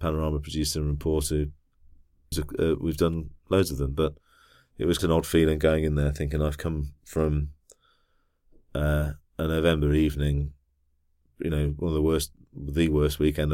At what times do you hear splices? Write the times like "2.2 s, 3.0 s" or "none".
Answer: 2.3 s, 5.0 s